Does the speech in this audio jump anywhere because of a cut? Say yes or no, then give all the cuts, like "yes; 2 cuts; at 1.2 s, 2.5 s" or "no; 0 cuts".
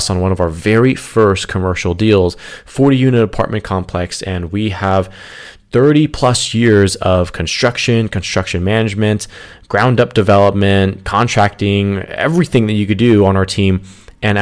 no; 0 cuts